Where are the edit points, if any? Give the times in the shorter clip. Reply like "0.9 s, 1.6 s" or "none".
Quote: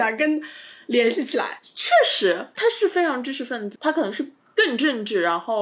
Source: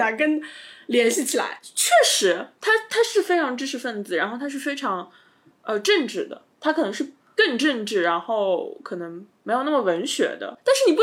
2.5 s, 3.8 s